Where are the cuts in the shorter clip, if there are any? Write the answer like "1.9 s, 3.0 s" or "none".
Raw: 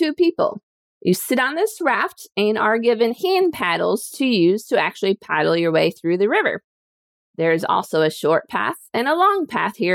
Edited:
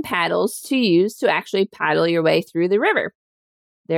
none

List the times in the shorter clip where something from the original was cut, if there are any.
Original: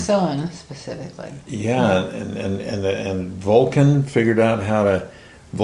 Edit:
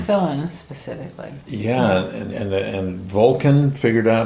2.3 s

